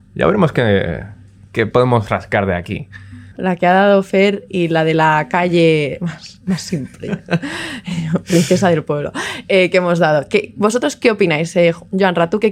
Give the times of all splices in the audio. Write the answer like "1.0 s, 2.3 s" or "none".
3.3 s